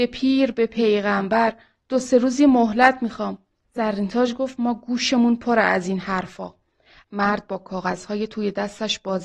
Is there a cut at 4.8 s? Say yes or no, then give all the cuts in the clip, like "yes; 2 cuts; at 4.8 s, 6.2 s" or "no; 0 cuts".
no; 2 cuts; at 3.6 s, 7.0 s